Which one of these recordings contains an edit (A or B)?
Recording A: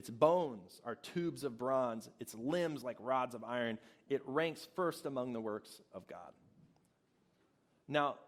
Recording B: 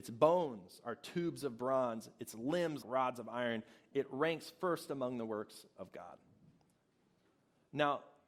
B